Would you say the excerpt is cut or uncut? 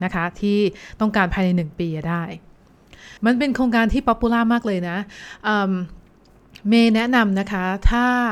cut